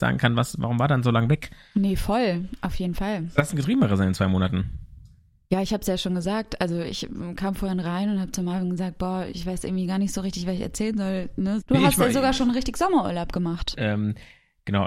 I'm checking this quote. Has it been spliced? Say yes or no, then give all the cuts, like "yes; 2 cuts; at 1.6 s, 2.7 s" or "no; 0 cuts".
yes; 2 cuts; at 11.6 s, 13.7 s